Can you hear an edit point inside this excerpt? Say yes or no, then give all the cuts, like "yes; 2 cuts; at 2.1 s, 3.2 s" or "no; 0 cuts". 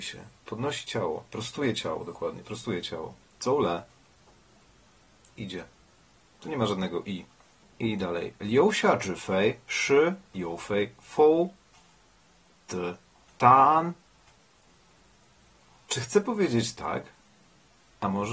yes; 2 cuts; at 7.6 s, 10.2 s